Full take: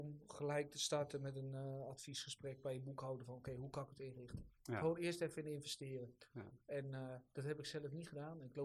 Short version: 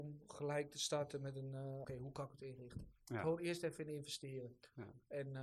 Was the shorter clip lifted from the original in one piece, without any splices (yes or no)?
no